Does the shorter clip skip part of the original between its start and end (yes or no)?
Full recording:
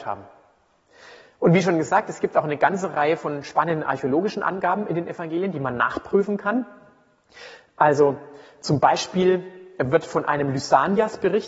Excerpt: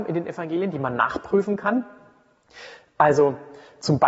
no